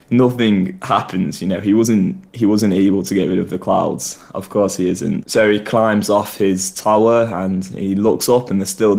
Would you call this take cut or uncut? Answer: uncut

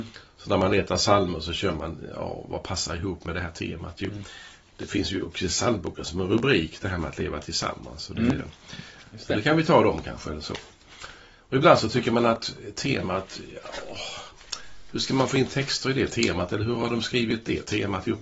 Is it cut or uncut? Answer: cut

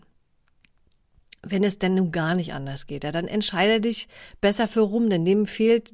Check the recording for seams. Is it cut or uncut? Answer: uncut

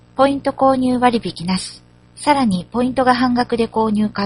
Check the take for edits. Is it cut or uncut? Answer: cut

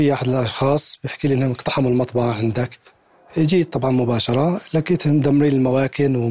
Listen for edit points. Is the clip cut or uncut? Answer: uncut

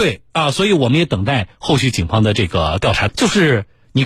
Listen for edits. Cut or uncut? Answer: cut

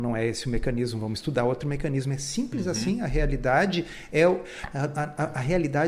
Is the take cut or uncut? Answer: uncut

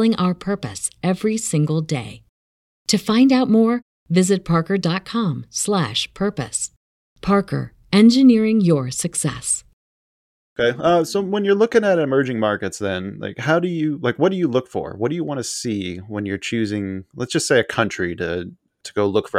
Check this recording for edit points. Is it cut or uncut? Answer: uncut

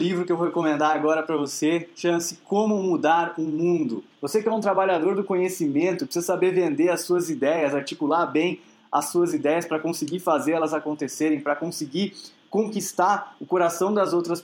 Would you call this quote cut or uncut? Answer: cut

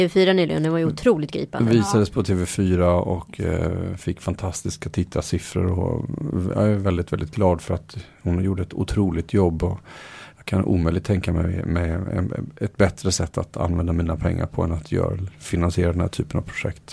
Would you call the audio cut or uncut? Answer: uncut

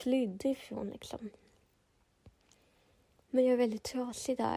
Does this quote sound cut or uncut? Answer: uncut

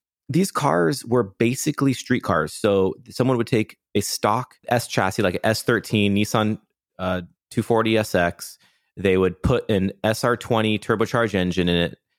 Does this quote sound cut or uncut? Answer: uncut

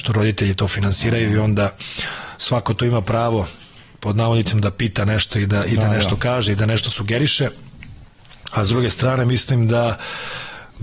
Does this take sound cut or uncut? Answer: uncut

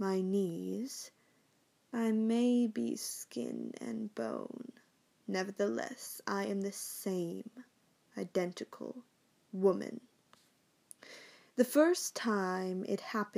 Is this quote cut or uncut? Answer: uncut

